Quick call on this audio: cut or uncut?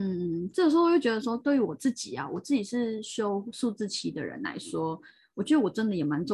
uncut